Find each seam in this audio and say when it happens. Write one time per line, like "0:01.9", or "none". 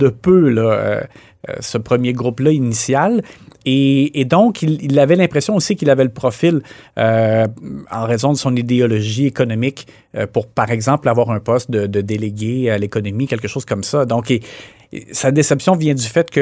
none